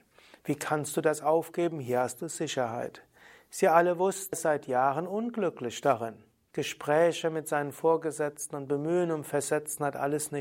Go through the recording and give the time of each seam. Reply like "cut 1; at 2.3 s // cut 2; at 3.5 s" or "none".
cut 1; at 4.3 s // cut 2; at 6.5 s